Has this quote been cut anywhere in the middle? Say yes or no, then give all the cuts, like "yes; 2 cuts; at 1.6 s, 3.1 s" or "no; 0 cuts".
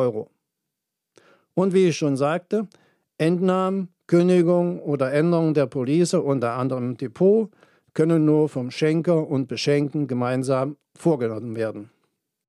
no; 0 cuts